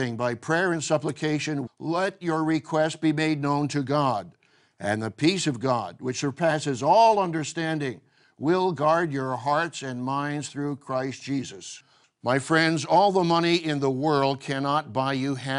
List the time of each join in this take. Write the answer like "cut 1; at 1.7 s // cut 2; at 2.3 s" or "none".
cut 1; at 1.7 s